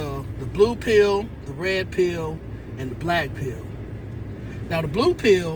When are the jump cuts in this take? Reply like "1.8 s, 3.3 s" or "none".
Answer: none